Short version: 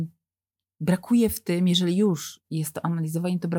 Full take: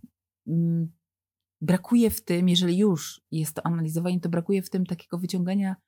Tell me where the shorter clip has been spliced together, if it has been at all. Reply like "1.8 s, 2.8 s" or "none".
none

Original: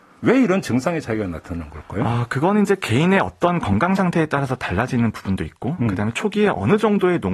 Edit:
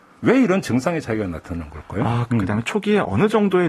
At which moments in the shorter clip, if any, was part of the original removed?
2.3 s

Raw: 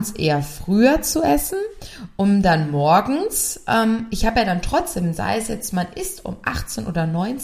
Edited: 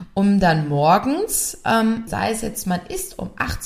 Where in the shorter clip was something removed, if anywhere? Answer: 2.1 s

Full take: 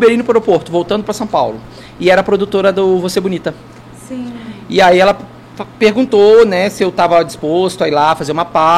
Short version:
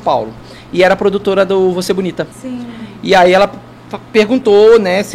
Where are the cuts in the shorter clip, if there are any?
2.3 s

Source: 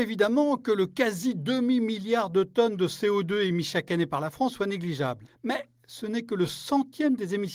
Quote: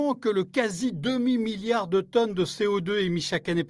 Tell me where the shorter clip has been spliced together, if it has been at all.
none

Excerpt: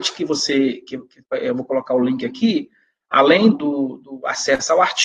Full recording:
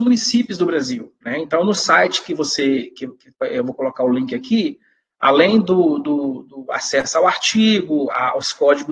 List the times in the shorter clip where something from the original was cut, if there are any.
3.5 s

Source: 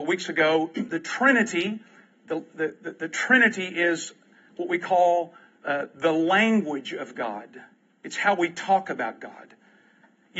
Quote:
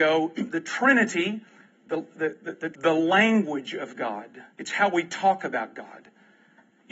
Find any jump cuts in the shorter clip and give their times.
2.7 s, 4.5 s

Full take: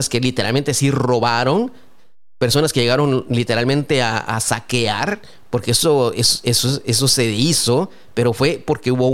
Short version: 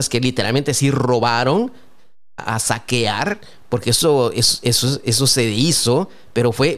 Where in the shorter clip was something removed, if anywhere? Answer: 2.4 s

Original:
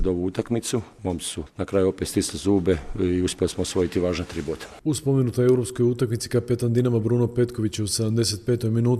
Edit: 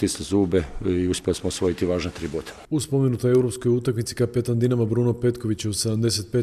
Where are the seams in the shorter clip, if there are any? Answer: none

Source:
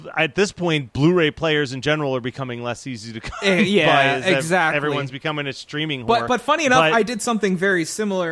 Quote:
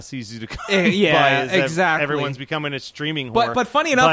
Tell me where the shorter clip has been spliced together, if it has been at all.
none

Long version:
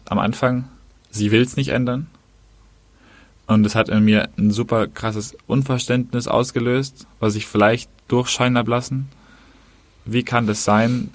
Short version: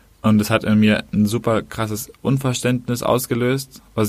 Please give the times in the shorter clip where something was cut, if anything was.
none

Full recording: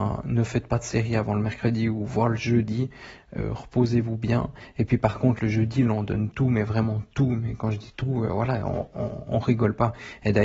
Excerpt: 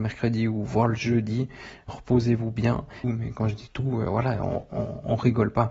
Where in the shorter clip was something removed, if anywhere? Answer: 1.9 s, 3.0 s

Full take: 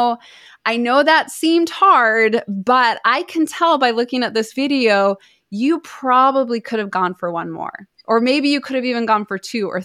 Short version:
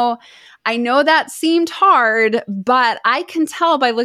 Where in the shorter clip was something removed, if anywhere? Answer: none

